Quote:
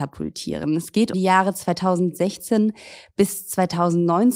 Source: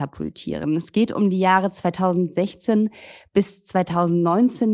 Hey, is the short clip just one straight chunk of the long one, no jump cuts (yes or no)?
no